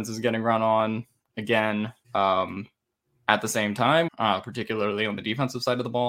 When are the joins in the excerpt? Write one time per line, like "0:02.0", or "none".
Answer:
0:02.0
0:04.1